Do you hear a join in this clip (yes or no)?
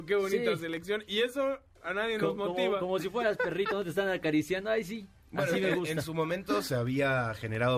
no